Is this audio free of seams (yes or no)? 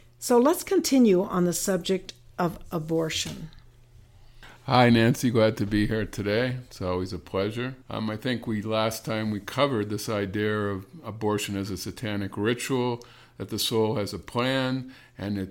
no